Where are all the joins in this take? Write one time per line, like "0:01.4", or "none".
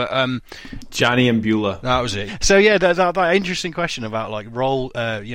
0:02.3